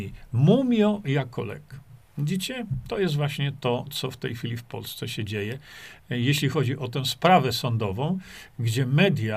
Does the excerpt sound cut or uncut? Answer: uncut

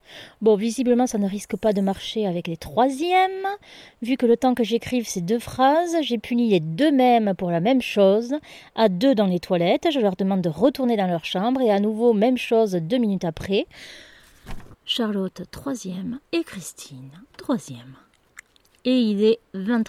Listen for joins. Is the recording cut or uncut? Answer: cut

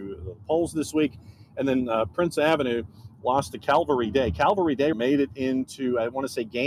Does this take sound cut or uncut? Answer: cut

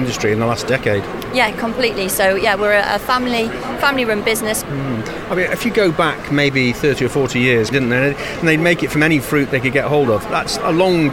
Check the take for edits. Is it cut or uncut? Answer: cut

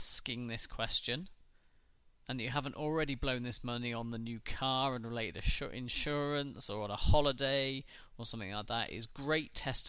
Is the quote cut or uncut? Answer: uncut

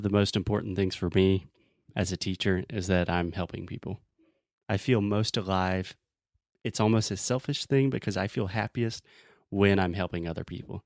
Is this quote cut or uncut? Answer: uncut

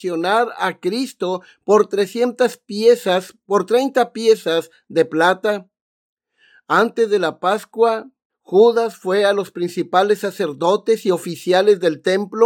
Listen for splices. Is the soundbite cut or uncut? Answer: cut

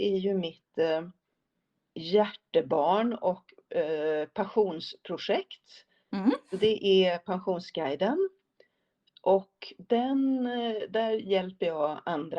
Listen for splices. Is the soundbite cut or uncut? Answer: uncut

